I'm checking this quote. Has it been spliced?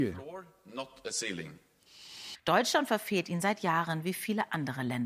yes; 1 cut; at 2.3 s

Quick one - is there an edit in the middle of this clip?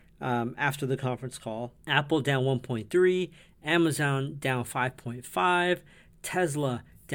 yes; 1 cut; at 1.8 s

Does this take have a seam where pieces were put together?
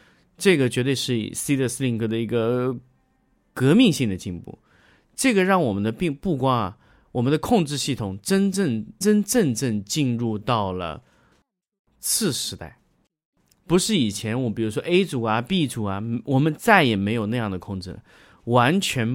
yes; 1 cut; at 9.0 s

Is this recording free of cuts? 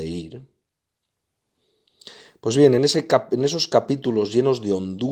yes; 0 cuts

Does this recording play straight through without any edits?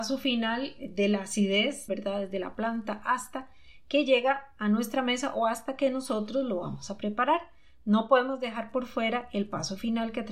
no; 1 cut; at 1.9 s

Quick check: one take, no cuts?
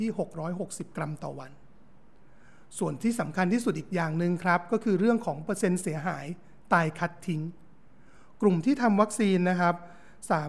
yes; 0 cuts

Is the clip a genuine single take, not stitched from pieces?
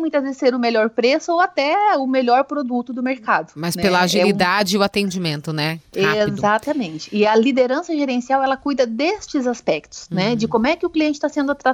yes; 0 cuts

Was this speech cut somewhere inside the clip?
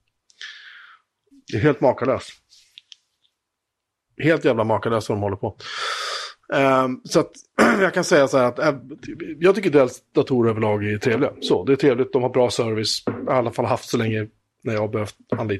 yes; 1 cut; at 1.3 s

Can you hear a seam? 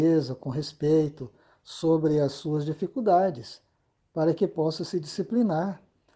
no; 0 cuts

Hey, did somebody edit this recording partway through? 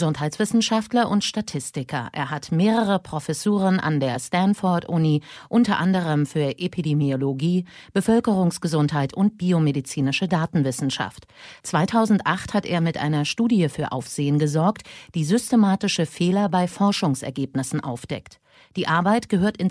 no; 0 cuts

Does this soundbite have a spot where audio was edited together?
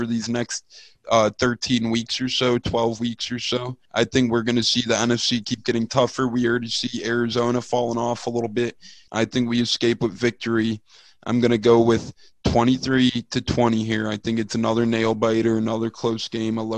yes; 2 cuts; at 3.9 s, 9.1 s

